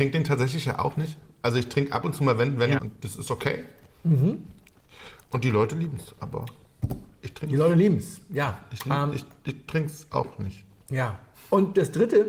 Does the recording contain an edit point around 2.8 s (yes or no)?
yes